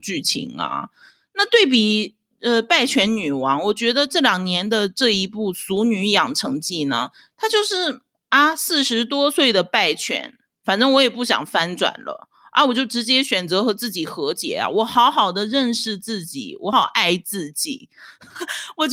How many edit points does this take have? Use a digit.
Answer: 1